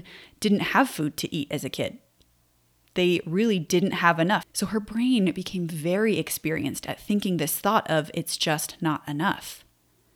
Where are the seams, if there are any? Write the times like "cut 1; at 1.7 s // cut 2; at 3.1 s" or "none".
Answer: cut 1; at 4.4 s